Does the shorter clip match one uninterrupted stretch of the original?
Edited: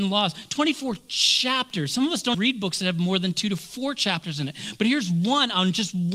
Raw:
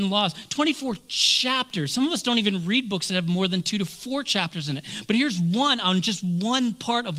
no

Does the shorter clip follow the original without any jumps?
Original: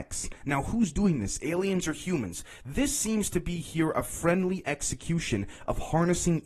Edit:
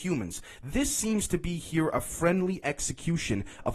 yes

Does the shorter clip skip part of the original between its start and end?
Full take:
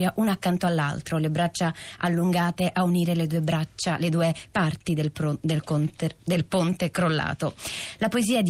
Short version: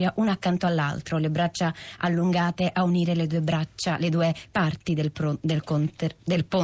no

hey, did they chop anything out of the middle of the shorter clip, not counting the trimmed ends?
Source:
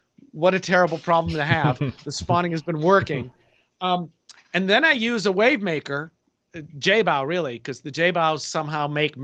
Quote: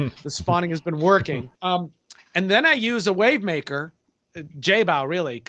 yes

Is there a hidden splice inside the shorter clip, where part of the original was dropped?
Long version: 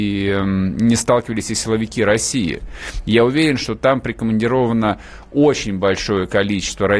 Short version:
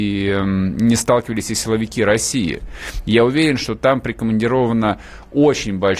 no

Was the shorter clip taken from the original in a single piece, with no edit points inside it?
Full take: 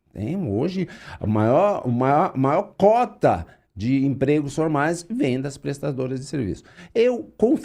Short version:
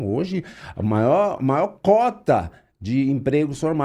no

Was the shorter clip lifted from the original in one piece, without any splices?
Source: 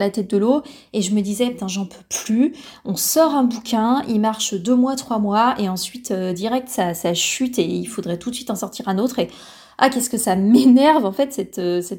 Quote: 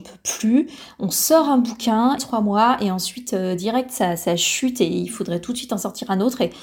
no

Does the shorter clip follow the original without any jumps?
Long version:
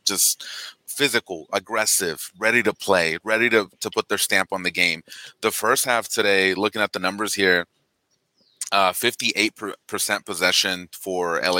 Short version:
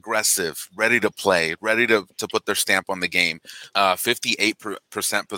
no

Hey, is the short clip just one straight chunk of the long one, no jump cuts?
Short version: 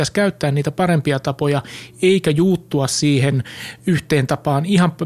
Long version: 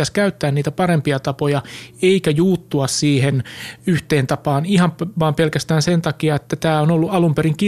yes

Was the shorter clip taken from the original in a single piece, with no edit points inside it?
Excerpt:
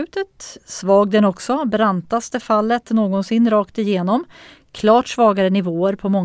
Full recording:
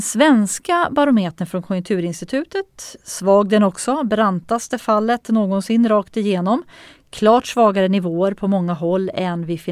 yes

